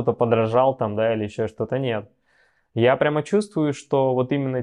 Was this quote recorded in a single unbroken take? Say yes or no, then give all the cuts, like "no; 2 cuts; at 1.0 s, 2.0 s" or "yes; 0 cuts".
yes; 0 cuts